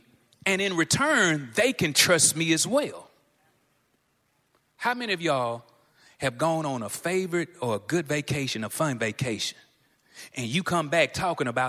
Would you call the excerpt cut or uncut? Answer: uncut